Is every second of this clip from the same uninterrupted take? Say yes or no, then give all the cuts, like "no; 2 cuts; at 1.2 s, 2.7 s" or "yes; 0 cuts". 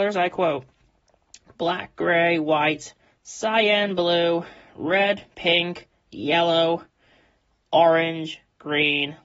yes; 0 cuts